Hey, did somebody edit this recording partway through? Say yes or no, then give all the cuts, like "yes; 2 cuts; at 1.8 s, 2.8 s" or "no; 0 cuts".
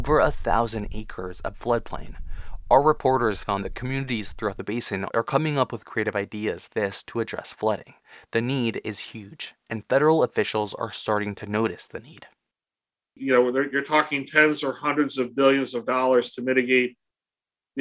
yes; 1 cut; at 6.7 s